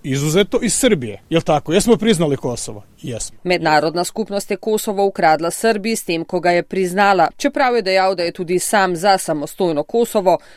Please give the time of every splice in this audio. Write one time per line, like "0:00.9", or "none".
0:07.3